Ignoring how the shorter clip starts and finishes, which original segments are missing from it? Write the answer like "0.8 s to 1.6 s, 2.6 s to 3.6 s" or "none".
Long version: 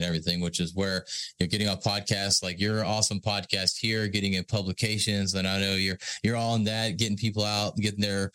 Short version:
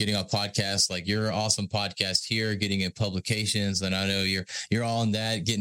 none